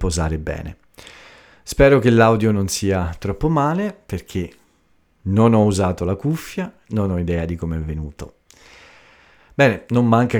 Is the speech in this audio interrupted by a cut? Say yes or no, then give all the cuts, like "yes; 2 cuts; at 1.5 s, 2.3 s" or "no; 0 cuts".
no; 0 cuts